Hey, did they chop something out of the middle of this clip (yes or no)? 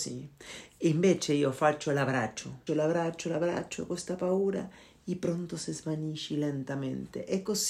yes